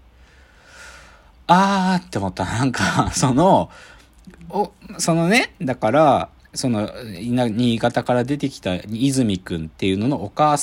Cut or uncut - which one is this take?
uncut